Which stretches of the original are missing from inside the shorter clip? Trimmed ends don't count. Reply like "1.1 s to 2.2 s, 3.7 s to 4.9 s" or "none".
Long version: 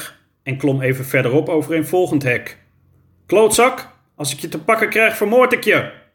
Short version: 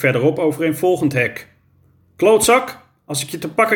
none